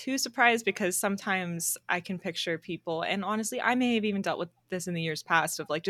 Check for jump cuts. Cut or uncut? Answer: uncut